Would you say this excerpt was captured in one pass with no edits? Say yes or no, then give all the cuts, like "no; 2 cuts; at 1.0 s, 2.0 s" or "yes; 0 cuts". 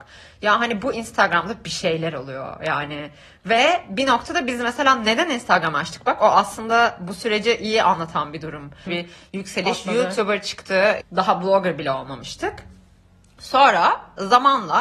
no; 2 cuts; at 8.9 s, 11.0 s